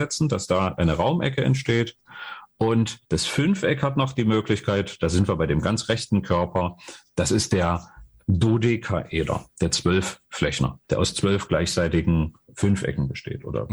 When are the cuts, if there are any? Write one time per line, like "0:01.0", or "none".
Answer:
0:03.1